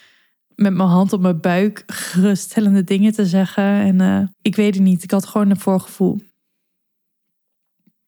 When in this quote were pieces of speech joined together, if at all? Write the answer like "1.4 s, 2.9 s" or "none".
4.3 s

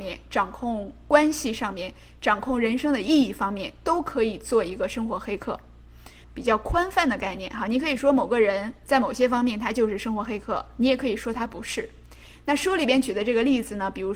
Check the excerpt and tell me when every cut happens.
6.2 s

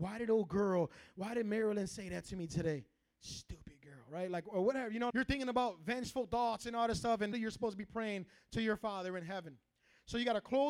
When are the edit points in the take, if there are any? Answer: 5.1 s, 7.3 s

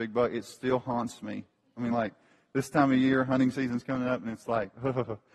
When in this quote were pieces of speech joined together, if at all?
none

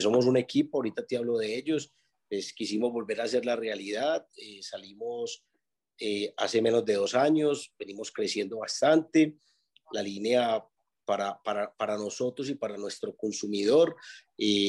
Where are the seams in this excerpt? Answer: none

